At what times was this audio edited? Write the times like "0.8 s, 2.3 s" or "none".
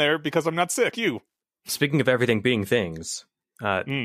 0.9 s